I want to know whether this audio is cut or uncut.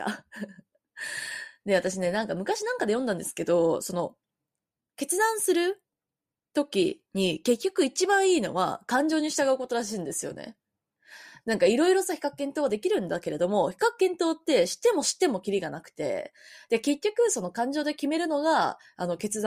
uncut